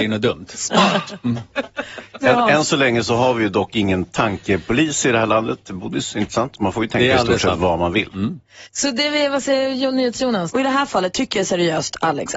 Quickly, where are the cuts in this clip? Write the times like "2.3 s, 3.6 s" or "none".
8.6 s, 10.5 s